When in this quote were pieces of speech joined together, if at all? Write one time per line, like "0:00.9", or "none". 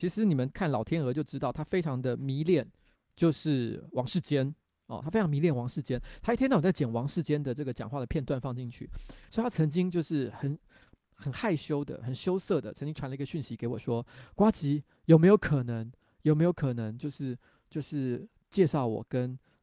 0:03.0
0:09.3